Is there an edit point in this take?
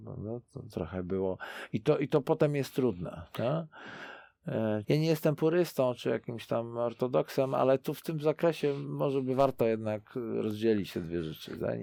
yes; 1 cut; at 4.8 s

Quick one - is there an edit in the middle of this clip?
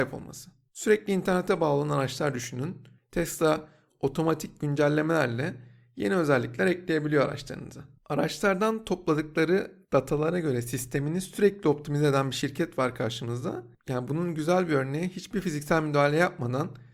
no; 0 cuts

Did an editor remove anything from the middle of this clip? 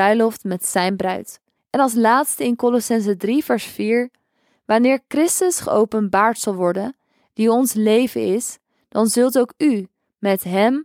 yes; 1 cut; at 1.6 s

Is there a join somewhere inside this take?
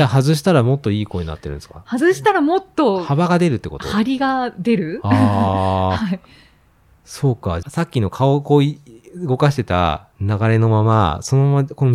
yes; 1 cut; at 7.6 s

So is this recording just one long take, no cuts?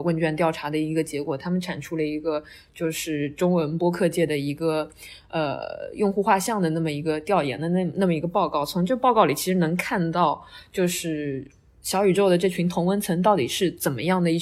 yes; 0 cuts

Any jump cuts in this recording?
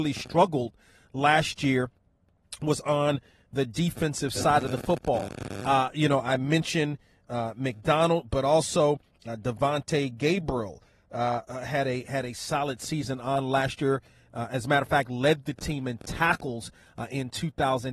no; 0 cuts

